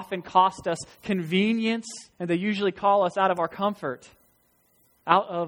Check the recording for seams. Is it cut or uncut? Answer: cut